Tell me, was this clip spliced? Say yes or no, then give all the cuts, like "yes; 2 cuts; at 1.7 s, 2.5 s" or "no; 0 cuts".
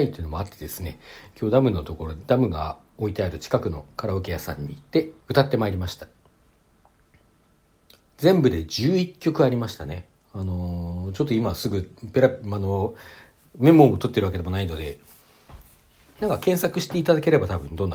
yes; 1 cut; at 5.2 s